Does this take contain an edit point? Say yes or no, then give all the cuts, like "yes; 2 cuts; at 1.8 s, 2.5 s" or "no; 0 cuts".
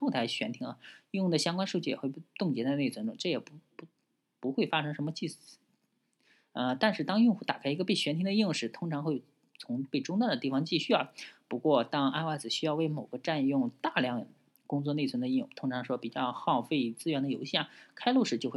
no; 0 cuts